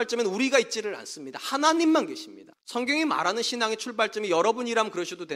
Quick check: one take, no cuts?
no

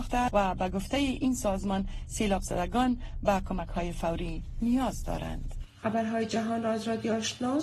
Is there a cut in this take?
no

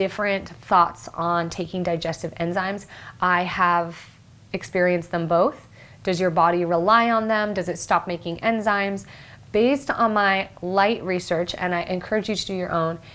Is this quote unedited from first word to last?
yes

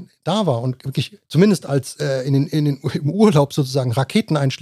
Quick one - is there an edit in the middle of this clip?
yes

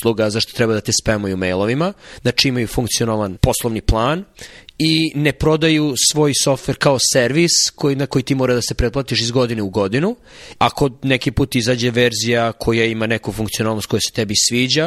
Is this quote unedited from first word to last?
no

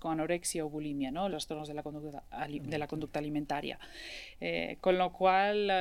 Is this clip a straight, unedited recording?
no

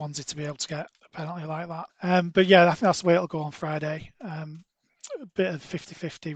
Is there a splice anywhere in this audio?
yes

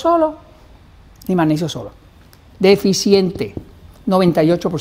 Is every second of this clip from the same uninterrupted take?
no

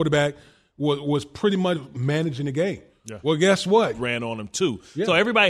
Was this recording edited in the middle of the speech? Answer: yes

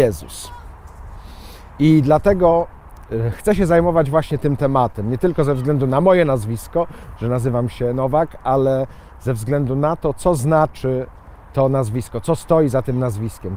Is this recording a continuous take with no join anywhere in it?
yes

